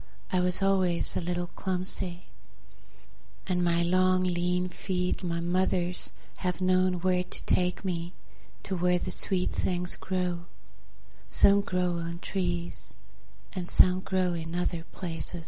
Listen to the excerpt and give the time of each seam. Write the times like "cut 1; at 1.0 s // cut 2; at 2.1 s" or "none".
cut 1; at 5.2 s